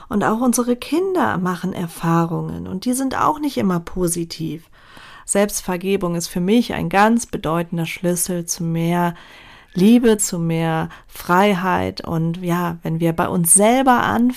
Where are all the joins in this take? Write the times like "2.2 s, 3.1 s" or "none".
5.2 s, 10.2 s